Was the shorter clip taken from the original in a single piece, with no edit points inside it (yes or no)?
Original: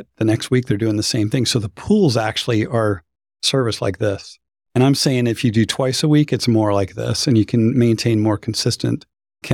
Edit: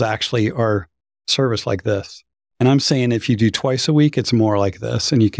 yes